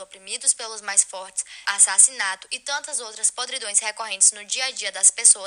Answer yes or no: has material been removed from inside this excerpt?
yes